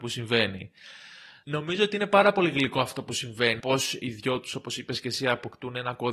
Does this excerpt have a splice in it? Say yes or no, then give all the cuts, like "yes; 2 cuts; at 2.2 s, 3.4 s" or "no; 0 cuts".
yes; 2 cuts; at 1.4 s, 3.6 s